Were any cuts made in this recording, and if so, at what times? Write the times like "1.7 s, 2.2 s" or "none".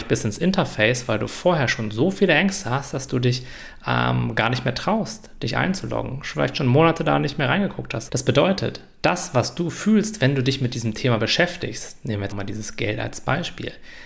8.1 s, 12.3 s